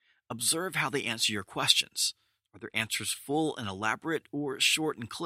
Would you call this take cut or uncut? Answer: uncut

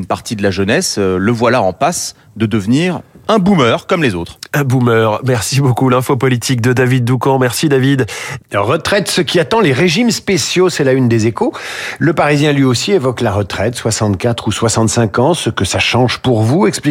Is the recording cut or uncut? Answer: cut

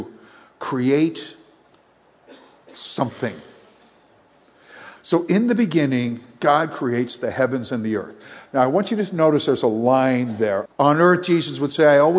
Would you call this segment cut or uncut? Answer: cut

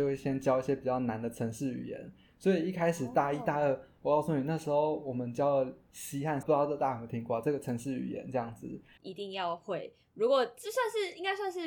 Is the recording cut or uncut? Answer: cut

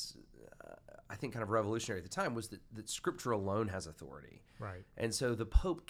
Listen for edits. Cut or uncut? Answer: uncut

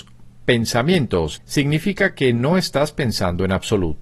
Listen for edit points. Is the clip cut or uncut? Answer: cut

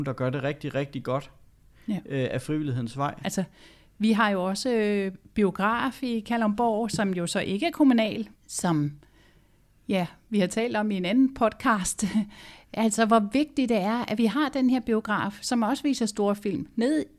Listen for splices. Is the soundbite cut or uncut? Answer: cut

